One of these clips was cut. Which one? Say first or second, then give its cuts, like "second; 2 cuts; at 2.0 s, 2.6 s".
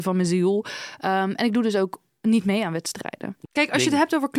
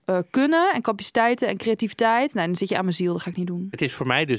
first; 1 cut; at 3.4 s